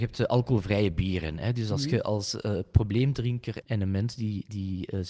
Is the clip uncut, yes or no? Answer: no